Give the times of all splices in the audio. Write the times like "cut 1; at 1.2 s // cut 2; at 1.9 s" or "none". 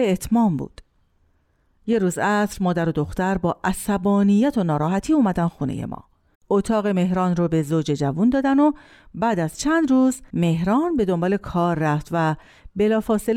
cut 1; at 6.3 s